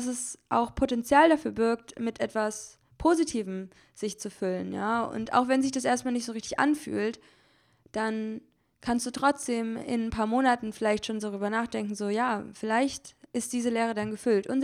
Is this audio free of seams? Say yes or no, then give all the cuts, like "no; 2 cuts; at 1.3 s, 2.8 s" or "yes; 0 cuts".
yes; 0 cuts